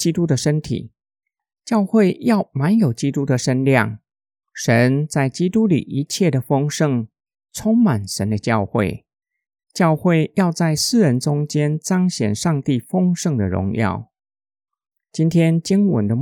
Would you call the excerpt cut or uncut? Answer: uncut